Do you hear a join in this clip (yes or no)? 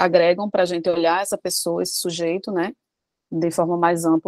no